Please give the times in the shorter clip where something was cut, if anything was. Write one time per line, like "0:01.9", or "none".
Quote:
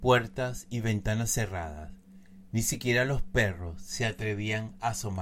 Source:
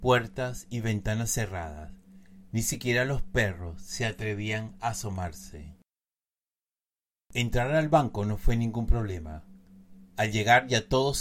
none